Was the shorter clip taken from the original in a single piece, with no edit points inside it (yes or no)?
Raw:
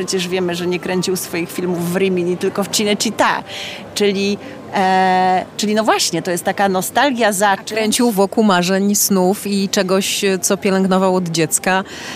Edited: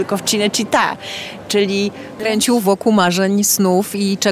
no